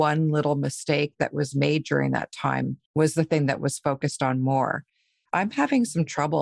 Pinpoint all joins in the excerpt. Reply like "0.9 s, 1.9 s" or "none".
5.3 s